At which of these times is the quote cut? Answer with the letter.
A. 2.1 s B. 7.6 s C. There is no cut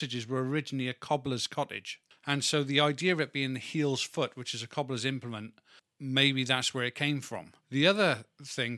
B